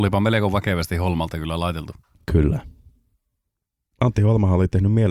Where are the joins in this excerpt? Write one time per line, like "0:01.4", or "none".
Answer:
none

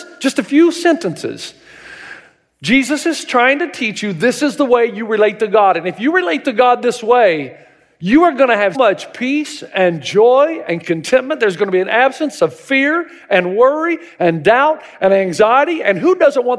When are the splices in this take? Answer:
0:08.7

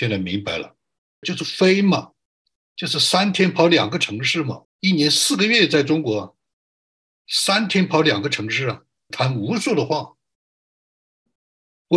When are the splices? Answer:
0:01.2
0:04.6
0:09.1

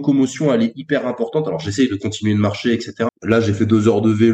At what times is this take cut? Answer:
0:03.1

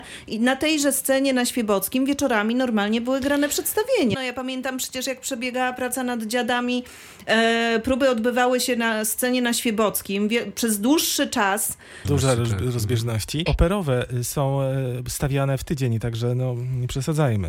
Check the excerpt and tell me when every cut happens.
0:04.1
0:12.0
0:13.5

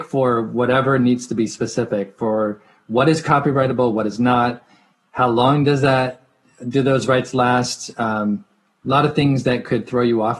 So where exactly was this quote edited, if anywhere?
none

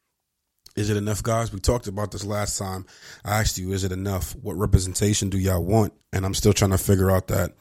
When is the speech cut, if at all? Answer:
0:06.0

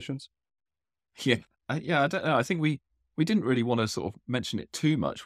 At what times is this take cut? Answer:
none

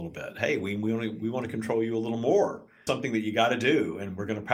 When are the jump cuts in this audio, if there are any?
0:02.9

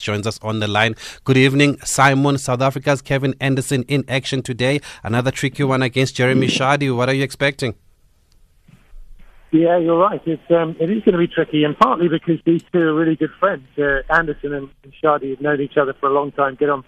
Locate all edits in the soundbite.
none

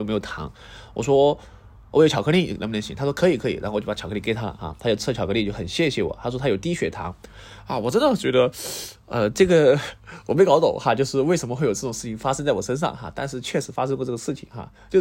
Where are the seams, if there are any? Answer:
none

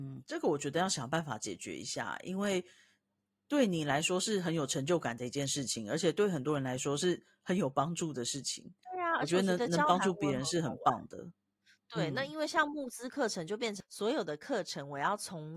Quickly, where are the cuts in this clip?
none

